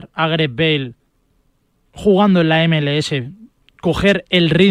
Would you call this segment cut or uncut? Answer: uncut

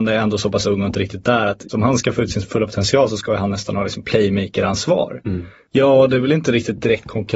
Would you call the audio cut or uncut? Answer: cut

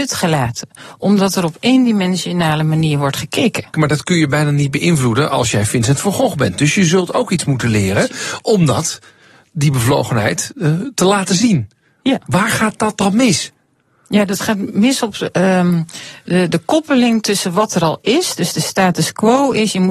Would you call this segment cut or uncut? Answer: cut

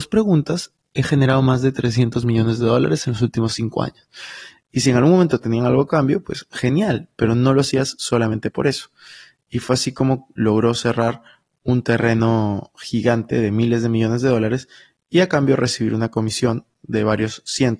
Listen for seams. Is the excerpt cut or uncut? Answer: cut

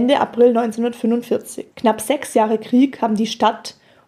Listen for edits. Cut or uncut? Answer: cut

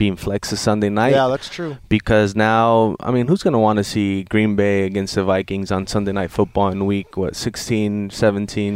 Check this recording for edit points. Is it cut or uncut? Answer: uncut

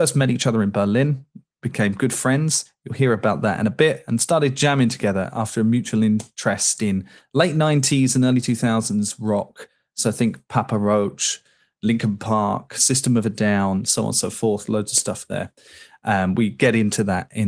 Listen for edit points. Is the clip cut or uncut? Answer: uncut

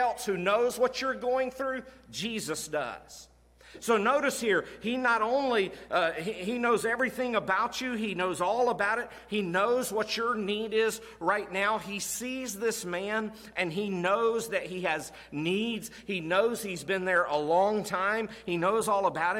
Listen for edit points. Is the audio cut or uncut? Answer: uncut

